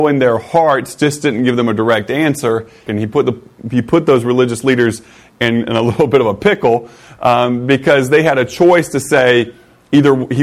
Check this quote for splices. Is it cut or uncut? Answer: cut